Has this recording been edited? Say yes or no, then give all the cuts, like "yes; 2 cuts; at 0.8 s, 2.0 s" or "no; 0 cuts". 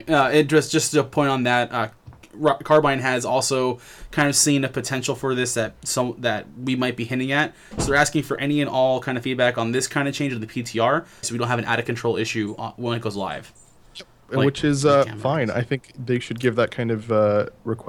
yes; 1 cut; at 11.2 s